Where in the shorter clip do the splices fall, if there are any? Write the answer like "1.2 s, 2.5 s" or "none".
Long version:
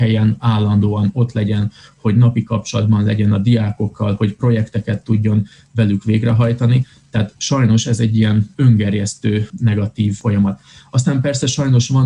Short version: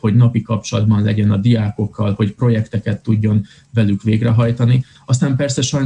4.9 s